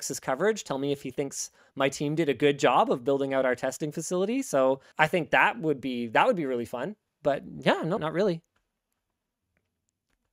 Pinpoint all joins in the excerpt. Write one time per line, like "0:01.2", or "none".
0:04.9
0:08.0

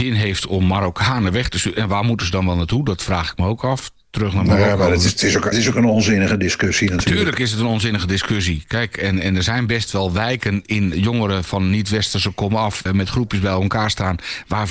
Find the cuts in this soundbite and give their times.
0:05.5
0:10.9
0:12.9

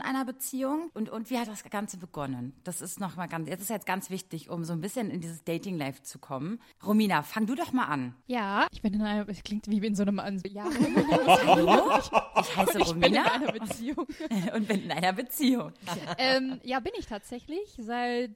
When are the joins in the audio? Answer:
0:08.7
0:10.4

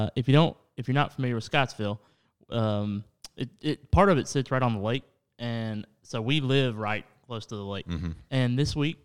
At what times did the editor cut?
none

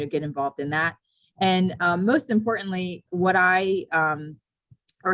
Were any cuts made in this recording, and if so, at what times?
none

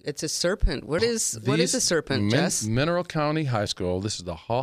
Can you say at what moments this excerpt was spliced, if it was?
0:01.0

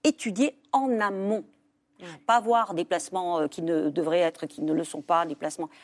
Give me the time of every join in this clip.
none

